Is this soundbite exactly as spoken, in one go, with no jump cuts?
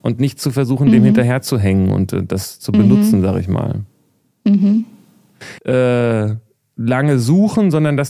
no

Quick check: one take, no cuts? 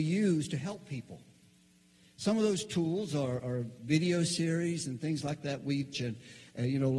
no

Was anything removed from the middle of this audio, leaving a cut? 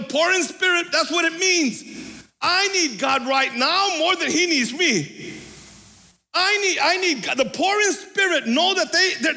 no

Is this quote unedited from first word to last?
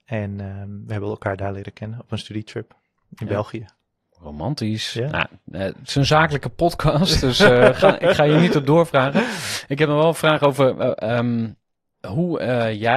yes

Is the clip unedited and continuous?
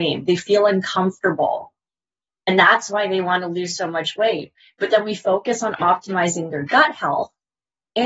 no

